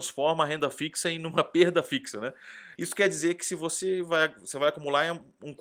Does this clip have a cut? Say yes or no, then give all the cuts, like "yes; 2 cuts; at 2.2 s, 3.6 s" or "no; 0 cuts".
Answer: yes; 1 cut; at 2.8 s